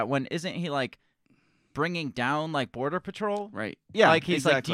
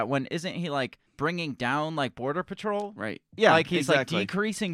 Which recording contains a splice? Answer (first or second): second